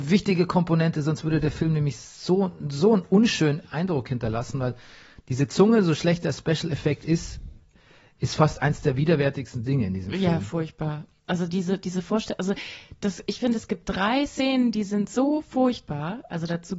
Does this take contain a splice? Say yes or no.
no